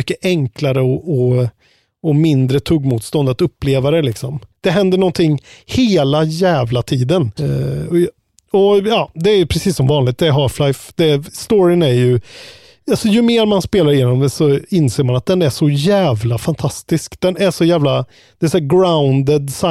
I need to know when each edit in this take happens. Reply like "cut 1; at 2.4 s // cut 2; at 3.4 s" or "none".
cut 1; at 4.5 s // cut 2; at 7.4 s